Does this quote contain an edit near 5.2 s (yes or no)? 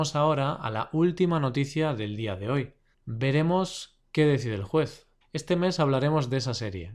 yes